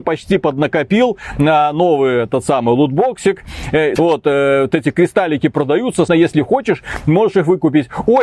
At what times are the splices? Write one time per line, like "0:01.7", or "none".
0:04.0
0:06.1